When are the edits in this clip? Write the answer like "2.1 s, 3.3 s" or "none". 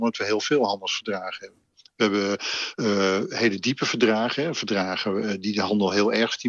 none